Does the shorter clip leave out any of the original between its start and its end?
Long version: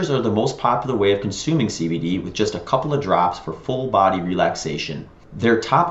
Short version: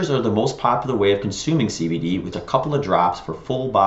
yes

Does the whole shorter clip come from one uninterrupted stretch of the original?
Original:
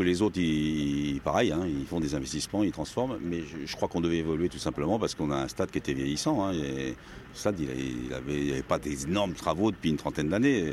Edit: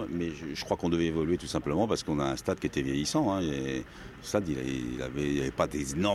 yes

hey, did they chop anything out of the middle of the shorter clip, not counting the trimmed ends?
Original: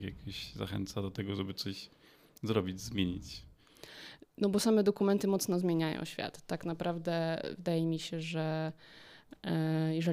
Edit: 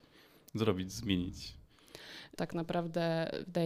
yes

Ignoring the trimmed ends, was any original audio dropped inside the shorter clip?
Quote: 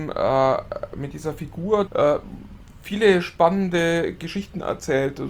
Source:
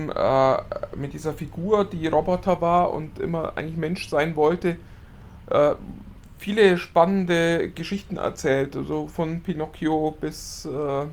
yes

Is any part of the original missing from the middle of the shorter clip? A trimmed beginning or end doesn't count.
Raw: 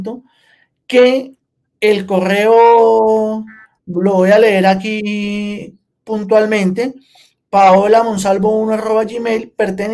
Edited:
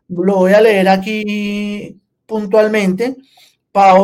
no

